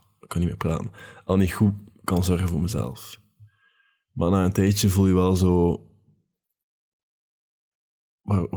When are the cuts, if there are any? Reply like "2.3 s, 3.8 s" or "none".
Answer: none